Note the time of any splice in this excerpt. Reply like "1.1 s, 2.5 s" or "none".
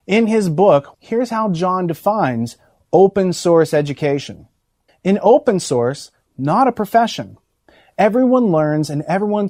0.9 s, 4.9 s, 6.3 s